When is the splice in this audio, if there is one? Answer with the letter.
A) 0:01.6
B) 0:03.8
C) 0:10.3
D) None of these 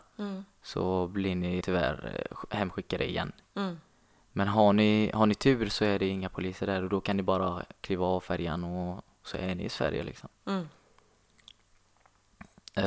A